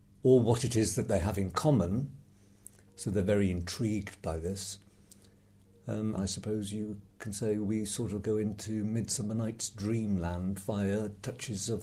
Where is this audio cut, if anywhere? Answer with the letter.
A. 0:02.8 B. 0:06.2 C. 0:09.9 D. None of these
B